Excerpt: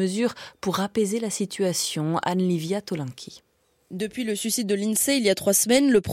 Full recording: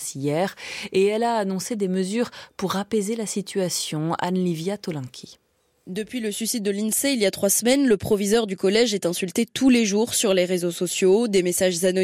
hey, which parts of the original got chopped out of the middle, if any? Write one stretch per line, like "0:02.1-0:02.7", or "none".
none